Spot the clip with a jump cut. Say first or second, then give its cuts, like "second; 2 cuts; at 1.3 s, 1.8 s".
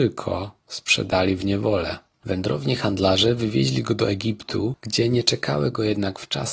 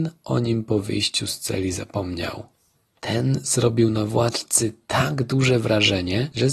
second; 1 cut; at 3.0 s